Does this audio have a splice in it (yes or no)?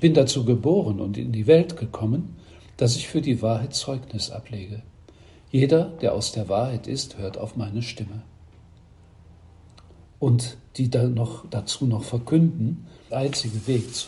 yes